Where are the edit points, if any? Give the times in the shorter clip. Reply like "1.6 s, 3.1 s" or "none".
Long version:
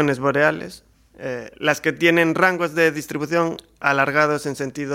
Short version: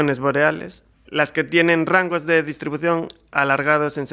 1.1 s